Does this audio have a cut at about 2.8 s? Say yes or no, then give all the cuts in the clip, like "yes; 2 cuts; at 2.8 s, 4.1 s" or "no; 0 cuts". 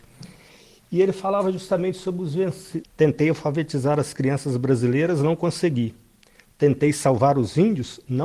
yes; 1 cut; at 2.8 s